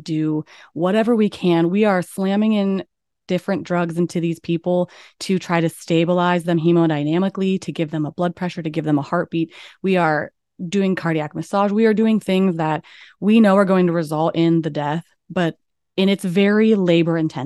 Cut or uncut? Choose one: uncut